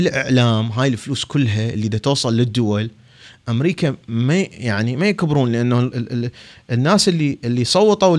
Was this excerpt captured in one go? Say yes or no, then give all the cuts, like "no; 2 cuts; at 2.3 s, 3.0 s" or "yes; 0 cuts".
yes; 0 cuts